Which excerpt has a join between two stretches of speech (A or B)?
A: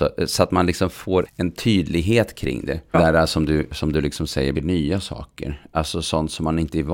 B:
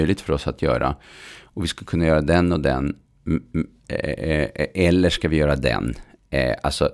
A